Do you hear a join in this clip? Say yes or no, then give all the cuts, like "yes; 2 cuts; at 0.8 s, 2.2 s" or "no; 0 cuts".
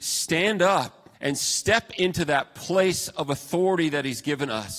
yes; 1 cut; at 1.1 s